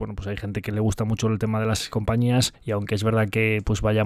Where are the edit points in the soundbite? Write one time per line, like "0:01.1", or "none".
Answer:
0:02.5